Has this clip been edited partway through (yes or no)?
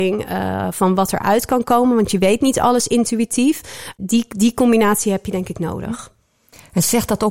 yes